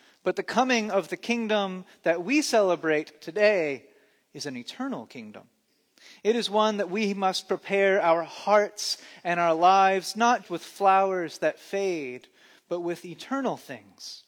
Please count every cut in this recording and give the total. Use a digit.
1